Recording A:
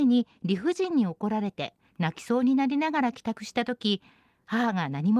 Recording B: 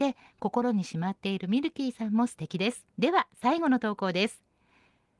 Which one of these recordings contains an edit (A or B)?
B